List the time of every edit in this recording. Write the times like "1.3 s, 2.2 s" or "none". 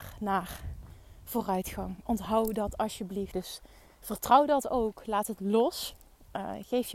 3.3 s